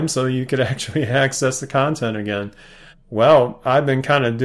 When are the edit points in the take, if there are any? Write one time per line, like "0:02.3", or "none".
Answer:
0:02.9

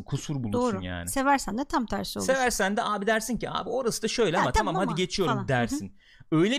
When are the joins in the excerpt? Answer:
none

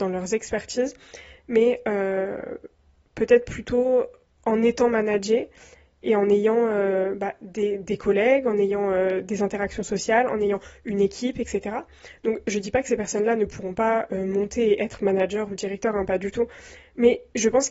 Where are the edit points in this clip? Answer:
none

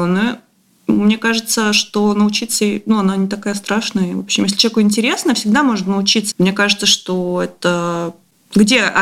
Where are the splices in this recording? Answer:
0:06.3

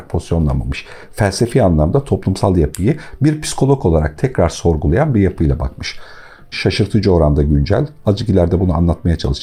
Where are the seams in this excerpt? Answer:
0:06.5

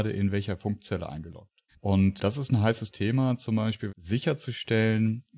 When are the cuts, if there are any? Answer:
0:01.7
0:03.9

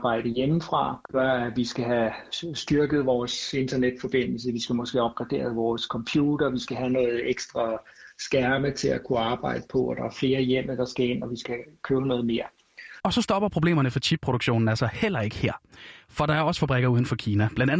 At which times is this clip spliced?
0:13.0

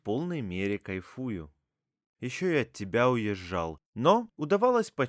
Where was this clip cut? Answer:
0:02.1
0:03.8

